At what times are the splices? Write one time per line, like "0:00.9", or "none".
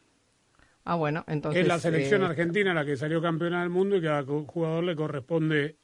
none

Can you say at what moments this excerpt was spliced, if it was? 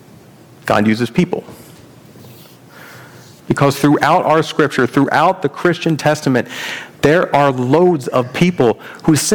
0:03.4

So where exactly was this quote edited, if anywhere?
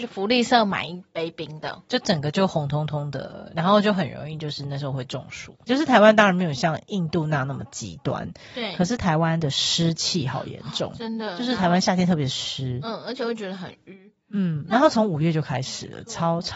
0:05.6

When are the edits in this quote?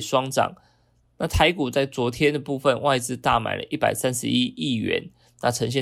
none

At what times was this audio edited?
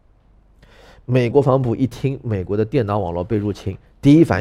0:01.3

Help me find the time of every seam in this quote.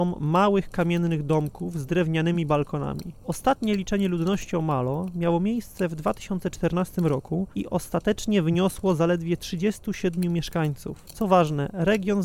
none

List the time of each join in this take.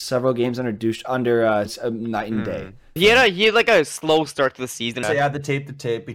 0:01.7
0:03.0
0:05.0

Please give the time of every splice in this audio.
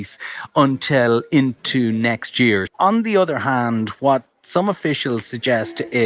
0:02.7

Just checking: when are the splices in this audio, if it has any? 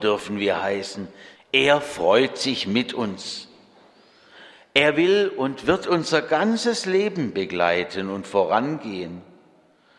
0:01.3

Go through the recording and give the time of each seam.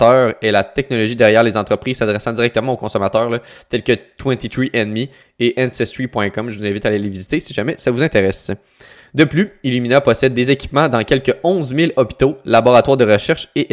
none

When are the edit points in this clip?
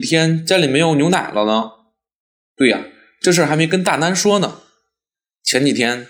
0:02.4

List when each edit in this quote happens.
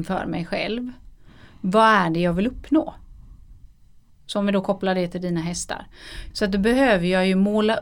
0:04.1
0:06.3

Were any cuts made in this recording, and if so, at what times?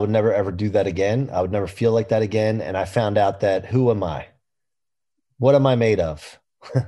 none

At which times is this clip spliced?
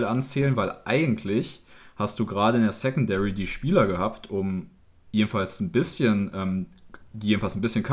none

